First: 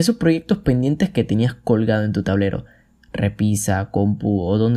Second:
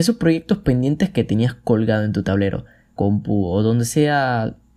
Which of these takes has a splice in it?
second; 1 cut; at 3.0 s

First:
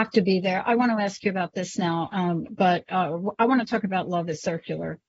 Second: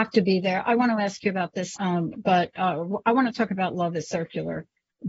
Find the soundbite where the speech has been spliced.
second; 1 cut; at 1.8 s

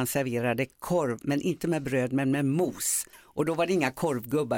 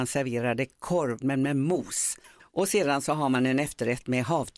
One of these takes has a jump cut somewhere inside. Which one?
second; 2 cuts; at 1.2 s, 2.4 s

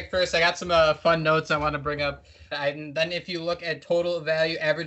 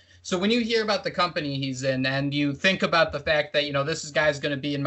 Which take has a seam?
first; 1 cut; at 2.5 s

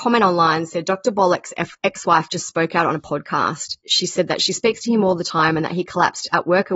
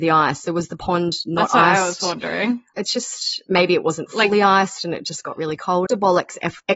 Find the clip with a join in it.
second; 2 cuts; at 2.7 s, 5.9 s

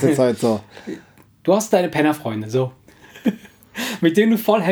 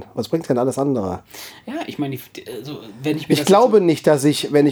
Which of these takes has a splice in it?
first; 1 cut; at 1.3 s

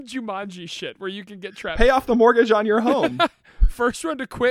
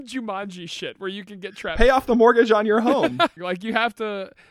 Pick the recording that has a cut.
second; 1 cut; at 3.4 s

